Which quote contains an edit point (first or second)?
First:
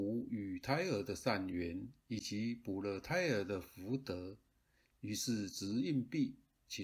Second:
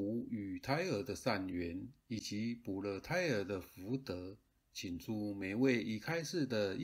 second